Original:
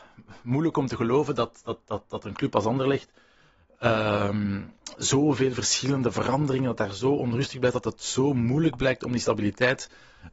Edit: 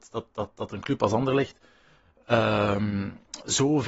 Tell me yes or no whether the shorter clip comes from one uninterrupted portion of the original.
yes